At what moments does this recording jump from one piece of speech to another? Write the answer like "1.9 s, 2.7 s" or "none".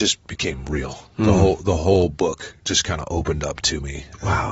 none